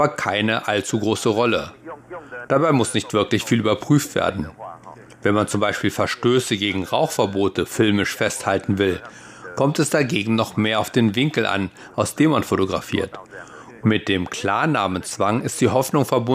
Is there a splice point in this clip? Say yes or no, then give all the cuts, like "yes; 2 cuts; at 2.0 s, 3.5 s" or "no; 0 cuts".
yes; 2 cuts; at 2.5 s, 13.8 s